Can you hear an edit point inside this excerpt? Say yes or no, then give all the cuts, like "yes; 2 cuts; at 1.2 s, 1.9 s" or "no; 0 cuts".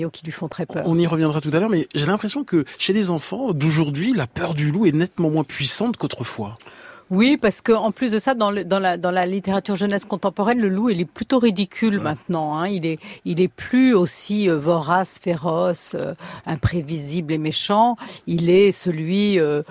no; 0 cuts